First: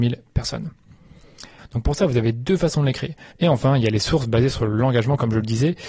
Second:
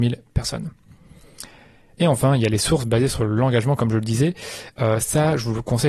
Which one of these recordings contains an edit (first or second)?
first